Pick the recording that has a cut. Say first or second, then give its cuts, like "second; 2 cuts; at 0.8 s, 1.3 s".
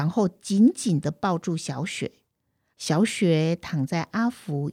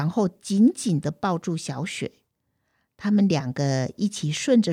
first; 1 cut; at 2.7 s